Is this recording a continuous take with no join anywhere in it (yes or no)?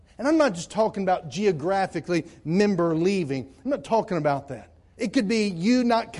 no